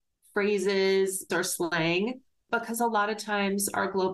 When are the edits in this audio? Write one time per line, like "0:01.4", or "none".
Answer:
0:01.3